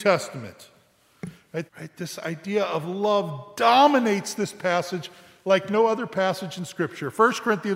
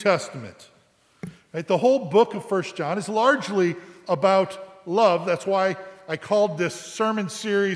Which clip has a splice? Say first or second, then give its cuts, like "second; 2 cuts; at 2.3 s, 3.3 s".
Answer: first; 1 cut; at 1.7 s